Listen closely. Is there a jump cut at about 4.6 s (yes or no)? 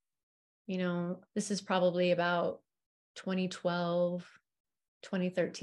no